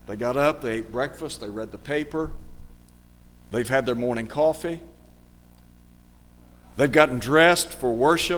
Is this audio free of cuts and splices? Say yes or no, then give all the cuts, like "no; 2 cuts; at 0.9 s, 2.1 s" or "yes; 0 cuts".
yes; 0 cuts